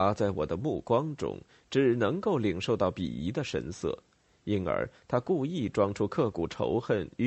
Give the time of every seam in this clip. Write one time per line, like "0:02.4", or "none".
none